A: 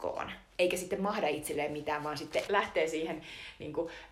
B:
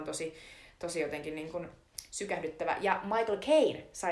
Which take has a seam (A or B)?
A